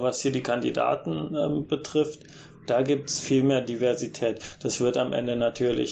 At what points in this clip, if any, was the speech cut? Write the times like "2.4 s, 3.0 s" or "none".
none